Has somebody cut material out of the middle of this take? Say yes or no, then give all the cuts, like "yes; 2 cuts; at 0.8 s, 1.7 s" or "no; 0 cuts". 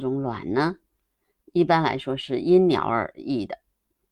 no; 0 cuts